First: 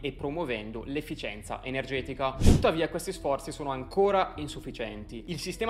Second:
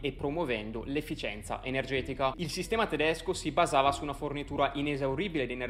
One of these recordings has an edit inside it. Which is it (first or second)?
second